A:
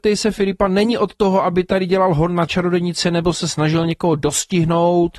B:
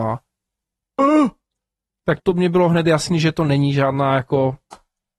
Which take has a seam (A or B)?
B